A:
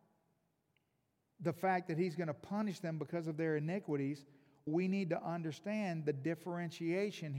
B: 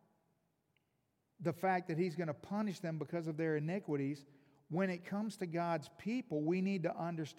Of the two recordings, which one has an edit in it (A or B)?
A